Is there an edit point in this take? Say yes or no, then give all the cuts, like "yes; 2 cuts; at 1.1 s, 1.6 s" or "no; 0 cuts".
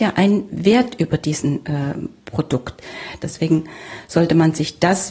yes; 1 cut; at 3.2 s